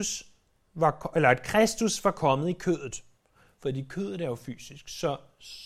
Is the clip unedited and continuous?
yes; 0 cuts

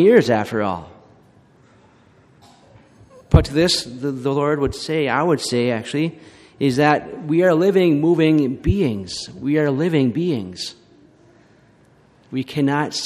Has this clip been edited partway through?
no; 0 cuts

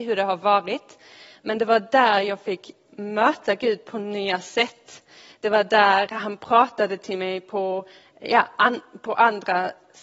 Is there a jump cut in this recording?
no; 0 cuts

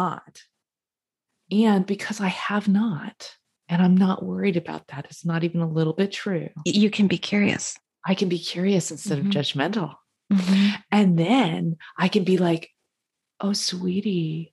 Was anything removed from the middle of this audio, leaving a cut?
no; 0 cuts

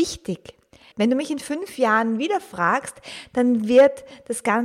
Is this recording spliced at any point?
yes; 1 cut; at 0.9 s

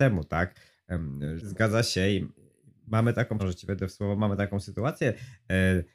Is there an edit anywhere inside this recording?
yes; 2 cuts; at 1.4 s, 3.4 s

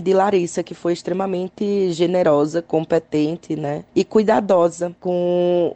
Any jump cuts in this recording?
no; 0 cuts

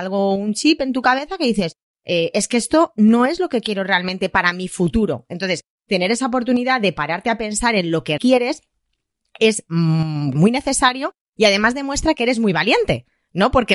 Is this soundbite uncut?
no; 2 cuts; at 8.2 s, 10.3 s

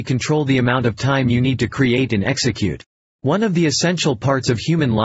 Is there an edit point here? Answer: yes; 1 cut; at 3.0 s

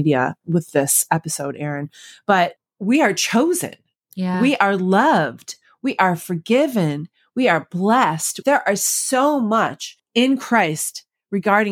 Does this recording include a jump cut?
yes; 1 cut; at 8.4 s

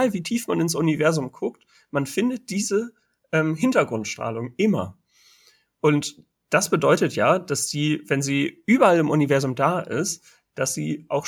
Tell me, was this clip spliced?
no; 0 cuts

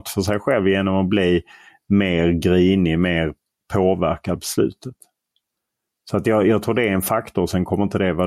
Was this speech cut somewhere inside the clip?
no; 0 cuts

